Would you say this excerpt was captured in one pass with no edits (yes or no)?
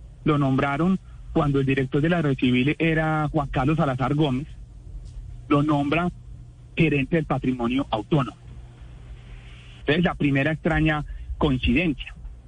no